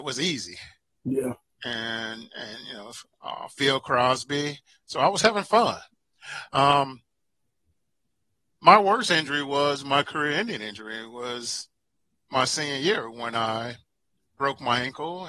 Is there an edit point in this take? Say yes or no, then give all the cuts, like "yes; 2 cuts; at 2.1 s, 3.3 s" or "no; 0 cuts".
no; 0 cuts